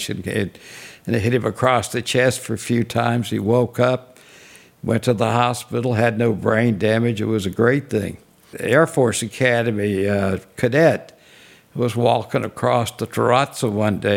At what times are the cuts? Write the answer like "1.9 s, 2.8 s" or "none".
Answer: none